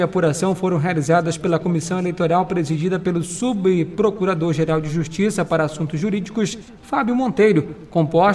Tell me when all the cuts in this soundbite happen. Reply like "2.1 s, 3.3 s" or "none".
none